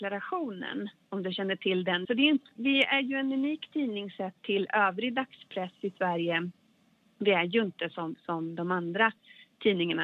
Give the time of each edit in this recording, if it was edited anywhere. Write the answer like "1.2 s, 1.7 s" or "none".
2.1 s